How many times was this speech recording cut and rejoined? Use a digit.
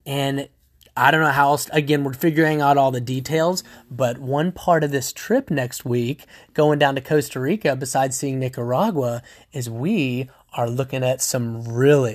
0